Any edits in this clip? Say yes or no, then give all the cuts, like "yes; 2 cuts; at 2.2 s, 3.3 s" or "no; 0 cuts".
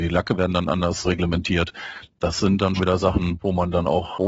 yes; 1 cut; at 2.8 s